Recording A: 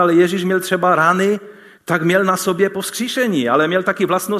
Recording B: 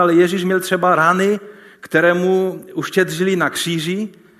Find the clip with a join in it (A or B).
A